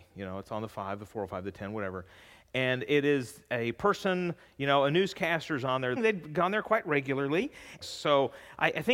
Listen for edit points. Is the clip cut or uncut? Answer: cut